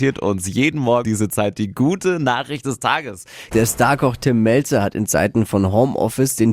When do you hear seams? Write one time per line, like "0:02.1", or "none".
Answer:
0:01.0
0:03.5